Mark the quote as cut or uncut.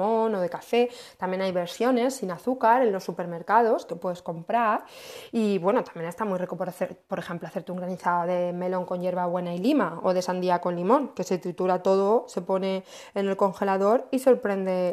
uncut